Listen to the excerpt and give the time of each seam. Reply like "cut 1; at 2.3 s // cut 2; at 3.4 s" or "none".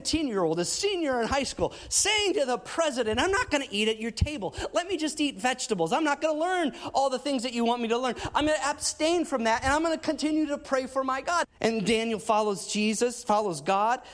cut 1; at 11.4 s

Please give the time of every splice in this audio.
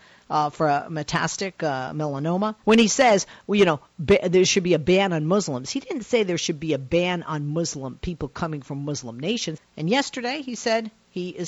cut 1; at 2.6 s // cut 2; at 9.6 s

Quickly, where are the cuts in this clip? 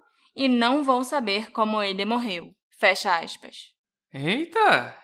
none

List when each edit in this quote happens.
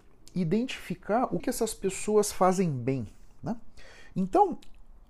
cut 1; at 1.4 s // cut 2; at 4.1 s

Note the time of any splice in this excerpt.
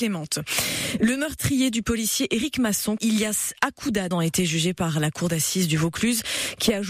cut 1; at 3.0 s // cut 2; at 4.1 s

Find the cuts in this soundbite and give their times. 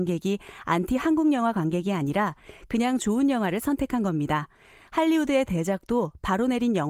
none

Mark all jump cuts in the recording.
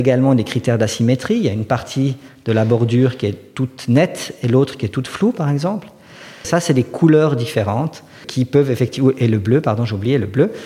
cut 1; at 6.4 s // cut 2; at 8.2 s

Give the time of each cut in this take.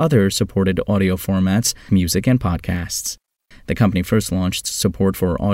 cut 1; at 1.9 s // cut 2; at 3.5 s

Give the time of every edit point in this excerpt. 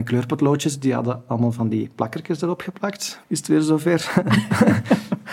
cut 1; at 3.2 s

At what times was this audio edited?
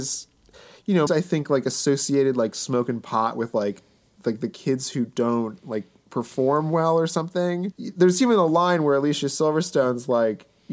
cut 1; at 1.1 s // cut 2; at 7.7 s

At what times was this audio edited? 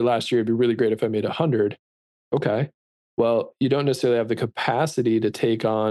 none

